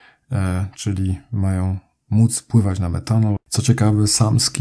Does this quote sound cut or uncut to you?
cut